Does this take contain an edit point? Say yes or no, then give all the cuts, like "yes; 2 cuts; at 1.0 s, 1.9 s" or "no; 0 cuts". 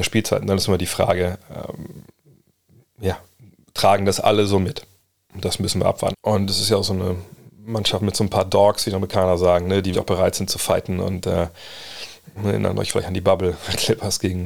yes; 3 cuts; at 6.1 s, 9.9 s, 12.4 s